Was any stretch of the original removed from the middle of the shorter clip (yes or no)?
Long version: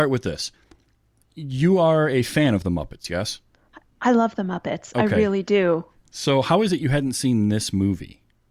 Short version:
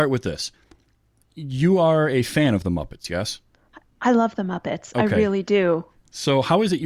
no